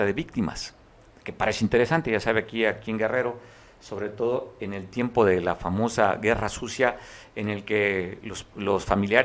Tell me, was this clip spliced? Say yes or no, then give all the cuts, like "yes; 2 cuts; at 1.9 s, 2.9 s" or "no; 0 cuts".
no; 0 cuts